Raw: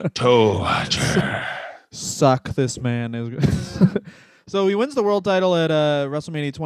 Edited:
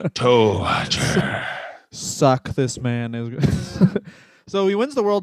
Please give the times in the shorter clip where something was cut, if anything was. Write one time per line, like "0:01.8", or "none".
none